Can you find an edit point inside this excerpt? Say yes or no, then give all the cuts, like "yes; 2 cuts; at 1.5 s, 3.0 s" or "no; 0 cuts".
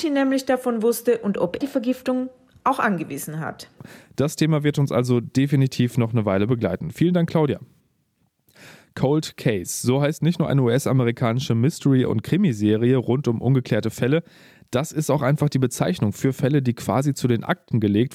yes; 1 cut; at 1.6 s